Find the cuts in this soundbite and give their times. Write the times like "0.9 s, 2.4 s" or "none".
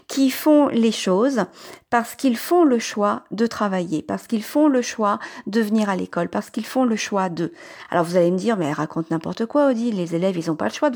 none